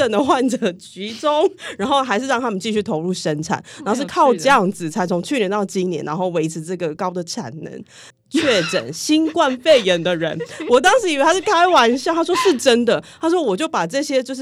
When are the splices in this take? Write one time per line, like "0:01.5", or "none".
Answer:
0:07.0
0:08.1